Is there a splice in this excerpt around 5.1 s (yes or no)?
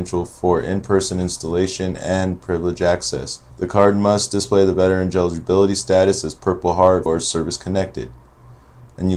no